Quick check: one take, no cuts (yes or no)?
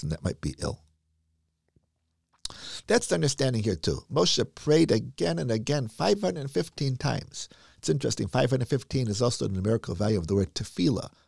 yes